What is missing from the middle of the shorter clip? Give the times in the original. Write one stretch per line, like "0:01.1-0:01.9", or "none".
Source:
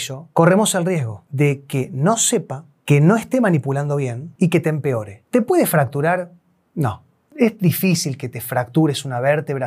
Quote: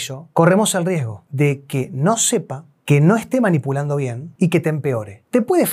none